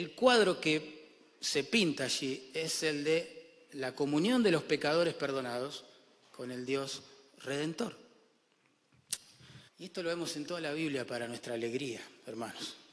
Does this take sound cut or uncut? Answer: cut